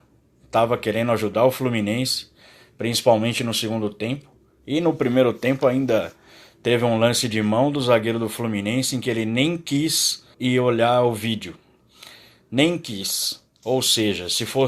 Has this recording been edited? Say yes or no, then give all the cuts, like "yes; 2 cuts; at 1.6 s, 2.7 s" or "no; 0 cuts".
yes; 1 cut; at 10.3 s